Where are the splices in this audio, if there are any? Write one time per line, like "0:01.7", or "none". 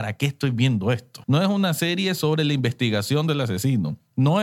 0:01.2